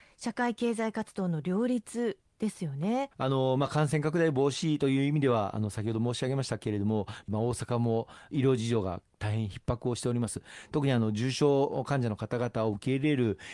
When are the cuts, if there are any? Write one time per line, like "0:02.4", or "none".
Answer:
0:03.1
0:07.2